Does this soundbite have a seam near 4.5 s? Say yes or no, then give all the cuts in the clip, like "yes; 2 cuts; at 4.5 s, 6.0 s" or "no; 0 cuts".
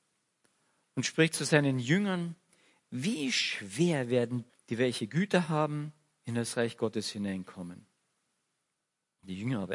yes; 1 cut; at 4.5 s